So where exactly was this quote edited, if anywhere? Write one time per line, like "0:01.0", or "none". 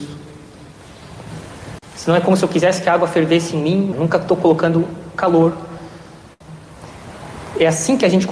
0:01.8
0:03.9